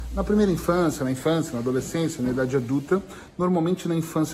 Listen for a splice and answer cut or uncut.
uncut